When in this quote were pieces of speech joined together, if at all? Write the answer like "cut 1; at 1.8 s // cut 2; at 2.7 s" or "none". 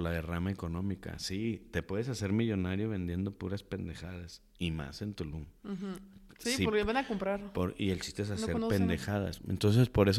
none